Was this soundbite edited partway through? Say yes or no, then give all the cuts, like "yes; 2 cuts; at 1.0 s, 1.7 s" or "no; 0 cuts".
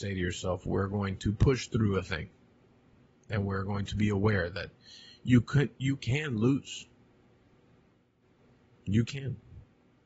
no; 0 cuts